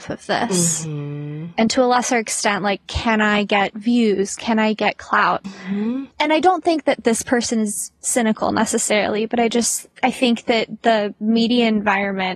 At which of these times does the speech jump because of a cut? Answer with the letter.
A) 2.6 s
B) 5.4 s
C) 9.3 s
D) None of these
B